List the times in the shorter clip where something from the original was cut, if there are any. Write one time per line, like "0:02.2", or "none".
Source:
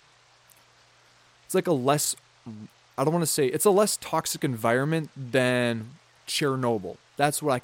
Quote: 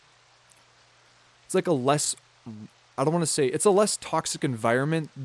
none

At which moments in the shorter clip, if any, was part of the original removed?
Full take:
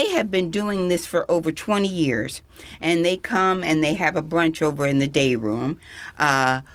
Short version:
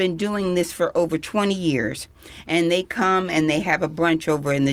none

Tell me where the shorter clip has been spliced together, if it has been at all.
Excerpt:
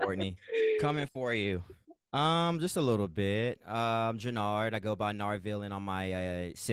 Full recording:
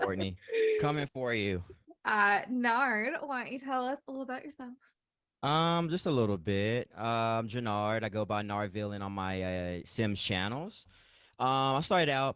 0:02.0

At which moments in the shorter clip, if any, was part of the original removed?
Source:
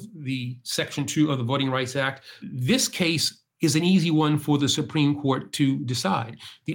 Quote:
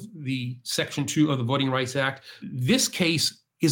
none

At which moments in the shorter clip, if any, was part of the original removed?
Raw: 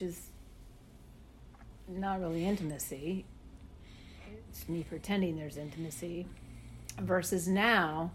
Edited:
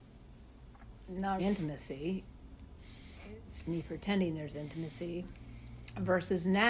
0:01.4

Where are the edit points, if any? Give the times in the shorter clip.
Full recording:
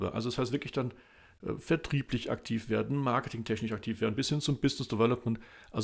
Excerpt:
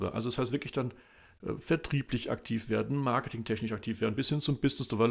none

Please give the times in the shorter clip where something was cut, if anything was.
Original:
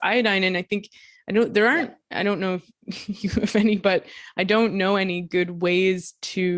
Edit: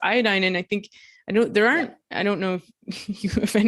none

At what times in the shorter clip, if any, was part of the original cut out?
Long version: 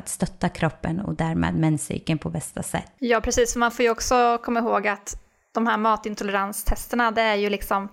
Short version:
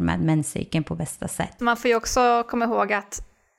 0:01.6

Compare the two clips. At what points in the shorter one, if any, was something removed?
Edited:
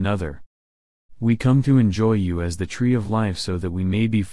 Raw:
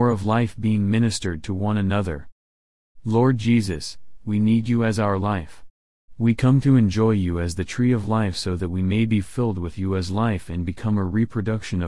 0:01.2

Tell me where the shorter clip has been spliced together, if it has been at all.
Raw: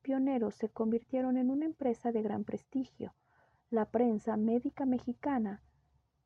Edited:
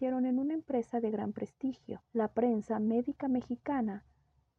0:02.0

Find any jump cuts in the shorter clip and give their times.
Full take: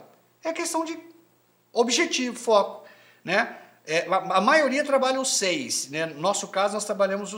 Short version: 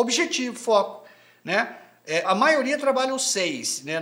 0:02.2

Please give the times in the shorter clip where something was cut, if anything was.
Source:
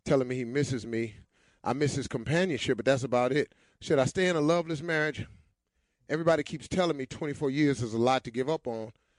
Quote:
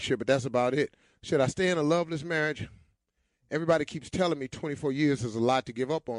none

